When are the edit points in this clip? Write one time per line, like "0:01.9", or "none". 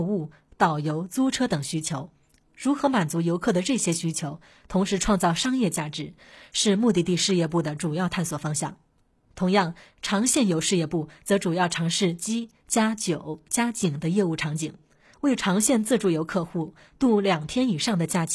0:15.1

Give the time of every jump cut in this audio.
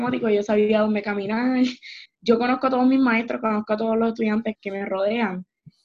0:02.1
0:04.6

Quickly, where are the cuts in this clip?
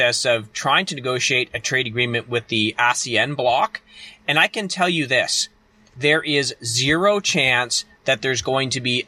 none

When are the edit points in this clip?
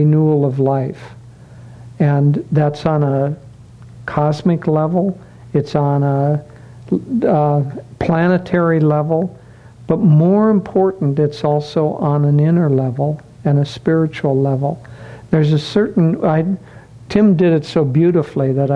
none

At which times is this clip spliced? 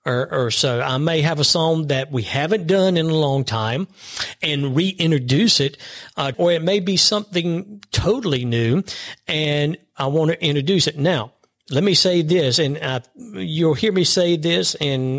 0:06.3

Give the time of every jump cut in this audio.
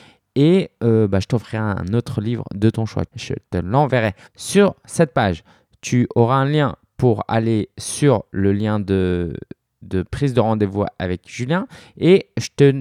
0:03.1
0:04.3

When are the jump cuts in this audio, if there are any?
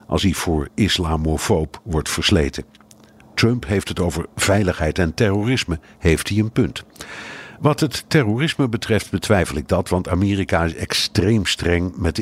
0:03.2

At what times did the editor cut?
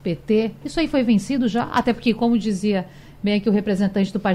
none

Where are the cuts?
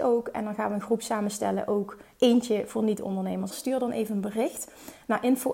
0:03.5

